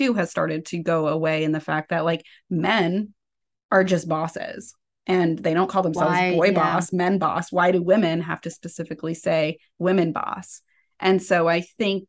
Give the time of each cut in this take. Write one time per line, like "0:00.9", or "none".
none